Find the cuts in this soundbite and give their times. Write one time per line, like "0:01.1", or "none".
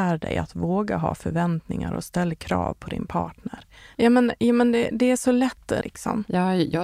0:03.9
0:05.8